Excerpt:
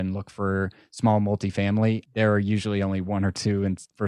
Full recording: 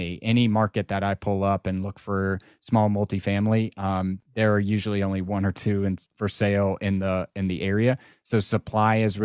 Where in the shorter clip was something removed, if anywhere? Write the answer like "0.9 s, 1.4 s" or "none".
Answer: 2.1 s